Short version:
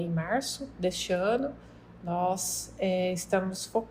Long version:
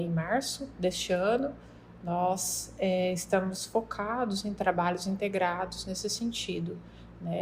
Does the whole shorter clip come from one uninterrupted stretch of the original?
yes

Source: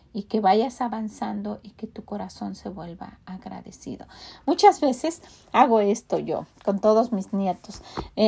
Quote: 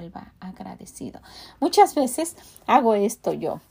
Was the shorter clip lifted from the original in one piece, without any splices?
yes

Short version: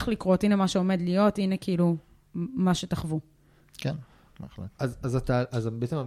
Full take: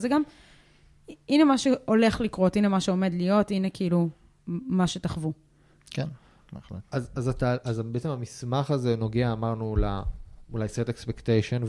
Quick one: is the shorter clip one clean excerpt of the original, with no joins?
yes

